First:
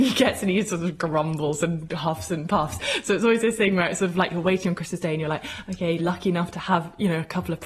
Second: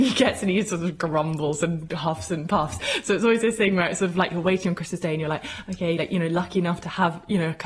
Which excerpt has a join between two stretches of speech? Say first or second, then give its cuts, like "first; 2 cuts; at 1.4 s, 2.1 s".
first; 1 cut; at 6.0 s